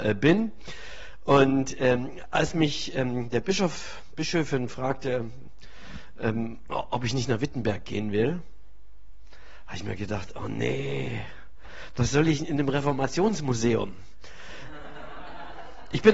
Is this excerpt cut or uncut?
uncut